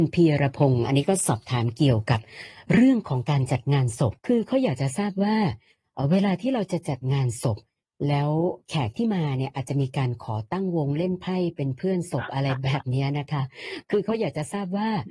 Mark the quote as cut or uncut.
cut